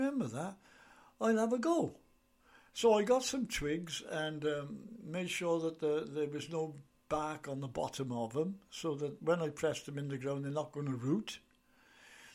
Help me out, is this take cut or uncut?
uncut